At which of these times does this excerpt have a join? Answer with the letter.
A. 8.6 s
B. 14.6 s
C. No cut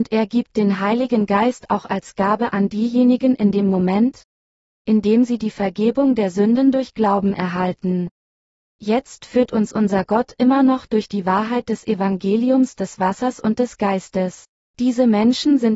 B